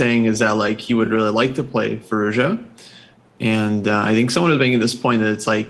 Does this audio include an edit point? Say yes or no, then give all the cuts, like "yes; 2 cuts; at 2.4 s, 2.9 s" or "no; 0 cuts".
no; 0 cuts